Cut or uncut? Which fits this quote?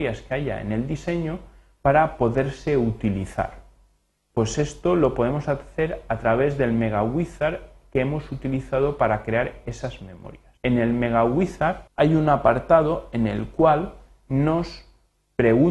cut